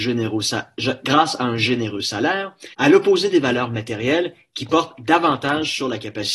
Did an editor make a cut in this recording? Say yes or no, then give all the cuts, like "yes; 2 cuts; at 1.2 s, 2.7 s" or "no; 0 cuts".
yes; 1 cut; at 2.7 s